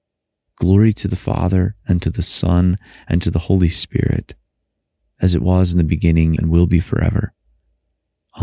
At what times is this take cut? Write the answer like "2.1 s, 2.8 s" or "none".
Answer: 6.4 s